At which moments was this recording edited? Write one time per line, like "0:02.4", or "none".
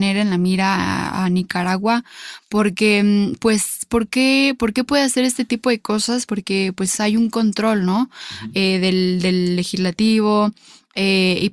none